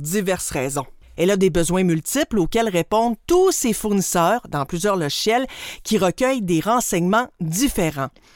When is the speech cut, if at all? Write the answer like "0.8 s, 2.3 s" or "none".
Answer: 1.1 s

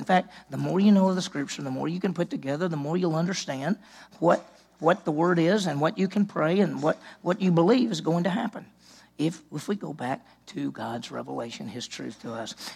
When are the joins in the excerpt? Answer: none

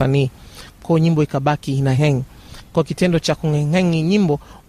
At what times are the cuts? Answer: 2.0 s

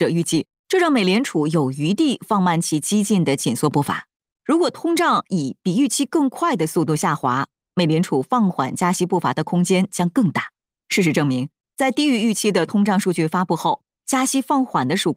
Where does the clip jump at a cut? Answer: 4.2 s

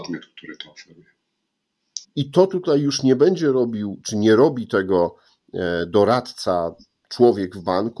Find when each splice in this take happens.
2.0 s

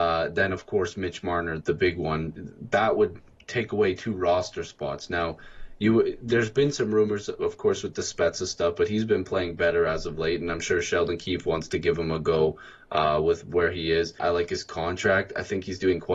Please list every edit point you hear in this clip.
1.6 s, 14.2 s

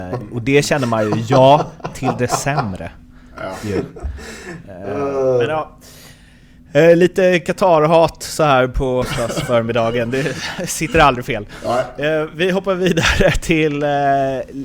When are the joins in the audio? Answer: 9.0 s

